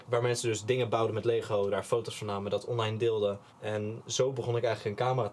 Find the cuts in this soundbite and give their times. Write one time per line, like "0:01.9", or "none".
0:03.5